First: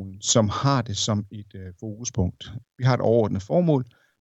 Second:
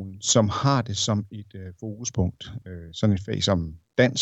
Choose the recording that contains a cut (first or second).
first